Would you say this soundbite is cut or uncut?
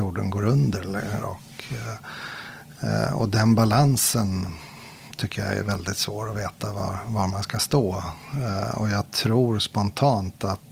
cut